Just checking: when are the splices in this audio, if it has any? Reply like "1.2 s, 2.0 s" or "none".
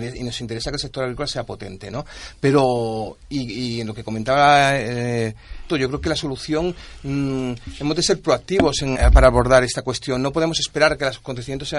5.7 s, 8.9 s